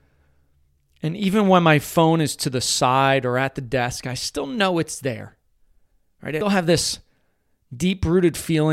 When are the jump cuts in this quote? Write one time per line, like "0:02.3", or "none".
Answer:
0:06.4